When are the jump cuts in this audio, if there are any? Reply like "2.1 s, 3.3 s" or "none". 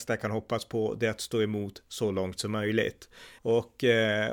3.4 s